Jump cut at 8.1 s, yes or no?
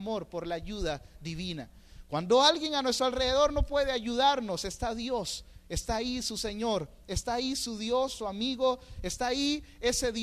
yes